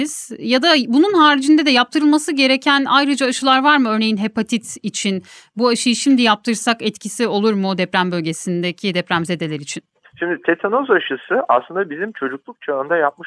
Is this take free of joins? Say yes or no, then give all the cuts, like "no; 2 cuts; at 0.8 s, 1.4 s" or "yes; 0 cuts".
no; 1 cut; at 10.0 s